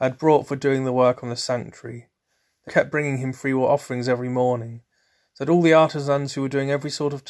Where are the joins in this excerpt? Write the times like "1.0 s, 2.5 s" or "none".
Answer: 2.7 s